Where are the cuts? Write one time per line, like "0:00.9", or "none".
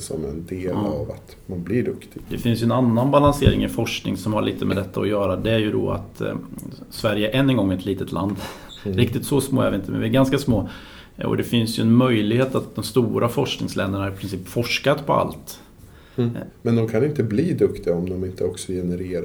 0:12.7
0:16.5